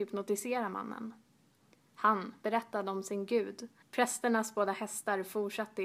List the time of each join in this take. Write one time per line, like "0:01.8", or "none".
0:02.4
0:03.8